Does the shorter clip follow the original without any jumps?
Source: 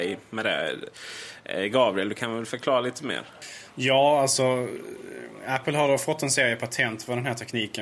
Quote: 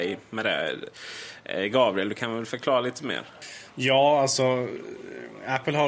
yes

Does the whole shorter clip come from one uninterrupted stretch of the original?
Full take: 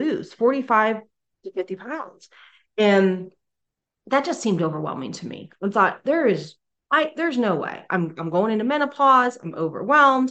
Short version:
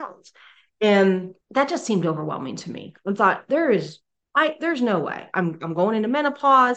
no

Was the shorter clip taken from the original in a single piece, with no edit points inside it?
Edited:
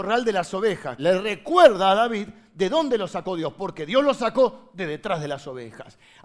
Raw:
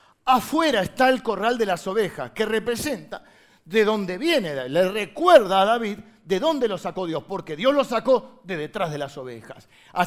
no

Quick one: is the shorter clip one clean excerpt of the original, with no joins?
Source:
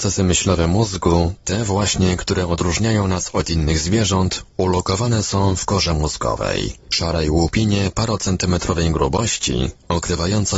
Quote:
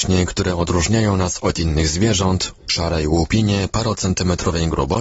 no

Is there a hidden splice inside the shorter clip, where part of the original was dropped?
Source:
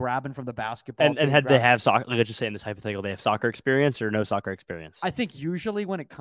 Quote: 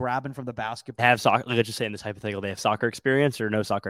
yes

